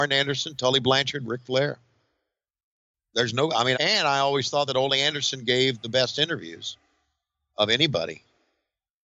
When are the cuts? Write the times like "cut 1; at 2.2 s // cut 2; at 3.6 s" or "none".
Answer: cut 1; at 3.7 s